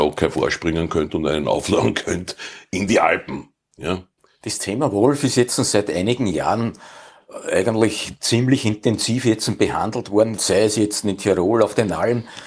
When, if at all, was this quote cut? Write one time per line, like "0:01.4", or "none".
0:10.4